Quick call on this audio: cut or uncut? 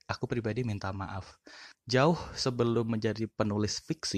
cut